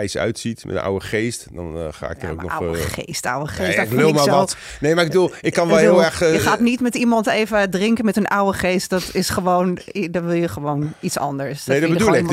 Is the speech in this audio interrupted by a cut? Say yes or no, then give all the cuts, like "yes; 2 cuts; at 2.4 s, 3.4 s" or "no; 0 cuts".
no; 0 cuts